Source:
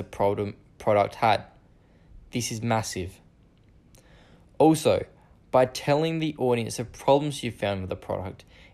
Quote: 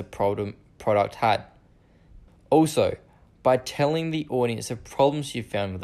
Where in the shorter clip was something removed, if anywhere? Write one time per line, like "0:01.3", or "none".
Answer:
0:02.3